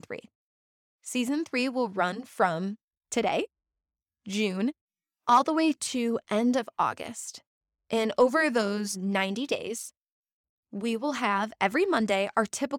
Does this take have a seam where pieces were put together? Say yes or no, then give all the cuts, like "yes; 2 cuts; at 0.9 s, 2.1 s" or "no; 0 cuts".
no; 0 cuts